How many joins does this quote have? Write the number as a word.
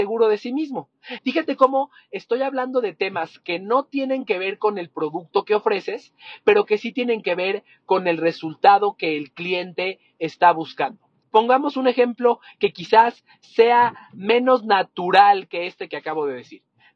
two